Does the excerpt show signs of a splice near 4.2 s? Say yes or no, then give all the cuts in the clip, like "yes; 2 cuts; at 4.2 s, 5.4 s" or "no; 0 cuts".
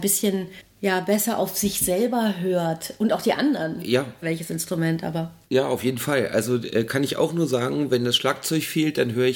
yes; 1 cut; at 4.2 s